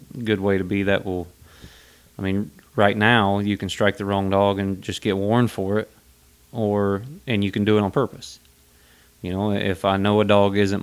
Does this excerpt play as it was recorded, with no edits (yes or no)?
yes